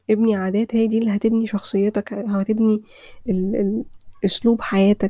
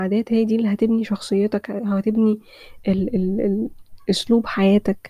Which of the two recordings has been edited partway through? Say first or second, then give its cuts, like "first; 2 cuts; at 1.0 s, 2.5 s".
first; 1 cut; at 3.3 s